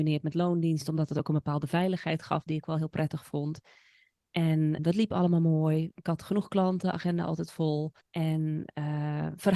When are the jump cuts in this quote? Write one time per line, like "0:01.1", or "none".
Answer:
0:04.8
0:08.0